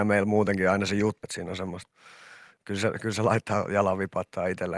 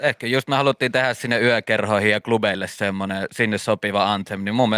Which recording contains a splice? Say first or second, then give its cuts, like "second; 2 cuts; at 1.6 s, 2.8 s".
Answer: first; 1 cut; at 1.2 s